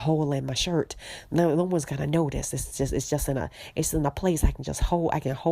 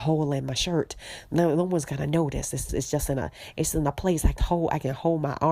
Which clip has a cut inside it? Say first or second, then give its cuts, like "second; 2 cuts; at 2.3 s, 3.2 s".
second; 2 cuts; at 2.7 s, 4.4 s